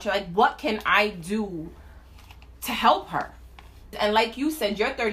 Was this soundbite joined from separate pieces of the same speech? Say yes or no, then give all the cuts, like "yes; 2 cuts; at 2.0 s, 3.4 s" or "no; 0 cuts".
yes; 1 cut; at 3.9 s